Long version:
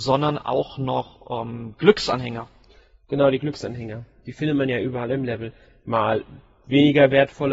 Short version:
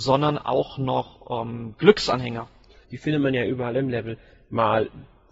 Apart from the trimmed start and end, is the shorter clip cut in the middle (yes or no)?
yes